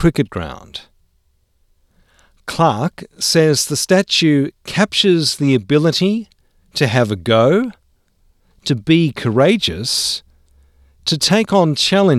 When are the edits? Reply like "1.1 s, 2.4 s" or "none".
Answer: none